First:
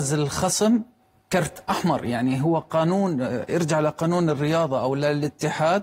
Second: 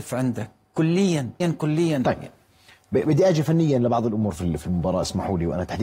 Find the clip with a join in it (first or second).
second